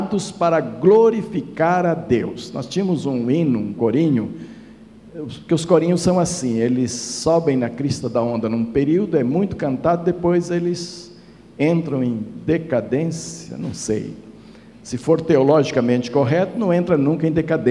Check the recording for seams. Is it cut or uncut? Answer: uncut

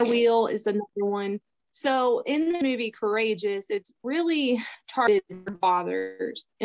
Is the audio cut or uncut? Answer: uncut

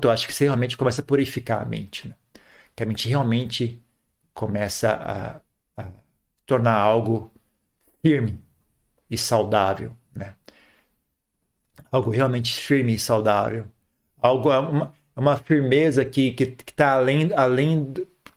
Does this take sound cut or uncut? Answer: uncut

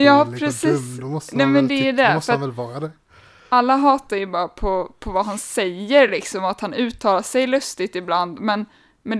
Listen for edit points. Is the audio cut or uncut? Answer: uncut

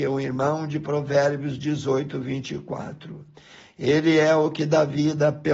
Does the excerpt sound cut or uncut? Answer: uncut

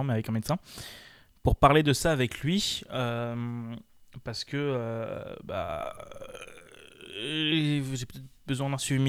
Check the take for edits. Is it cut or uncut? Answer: uncut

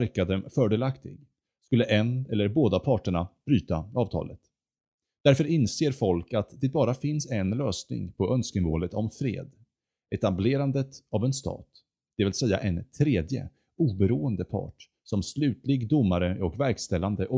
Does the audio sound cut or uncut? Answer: uncut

